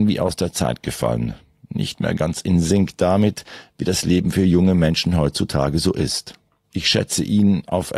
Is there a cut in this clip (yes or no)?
no